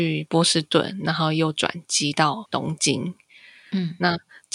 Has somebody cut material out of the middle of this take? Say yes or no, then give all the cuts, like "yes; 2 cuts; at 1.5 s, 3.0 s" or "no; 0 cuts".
no; 0 cuts